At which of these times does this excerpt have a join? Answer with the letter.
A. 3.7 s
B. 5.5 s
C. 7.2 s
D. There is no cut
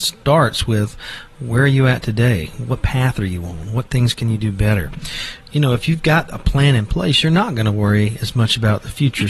D